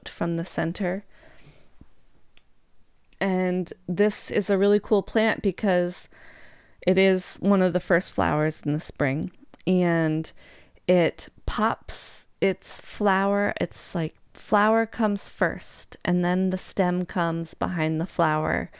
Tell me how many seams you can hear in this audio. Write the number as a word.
one